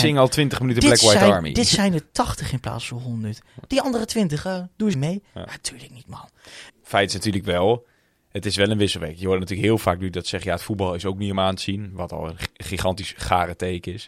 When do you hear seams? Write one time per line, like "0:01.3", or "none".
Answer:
0:04.9
0:06.7